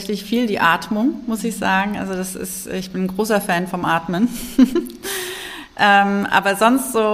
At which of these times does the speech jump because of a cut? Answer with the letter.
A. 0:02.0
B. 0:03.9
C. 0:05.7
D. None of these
D